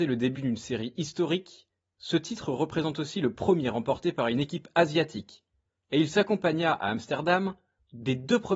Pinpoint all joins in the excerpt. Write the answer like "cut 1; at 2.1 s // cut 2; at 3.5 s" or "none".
none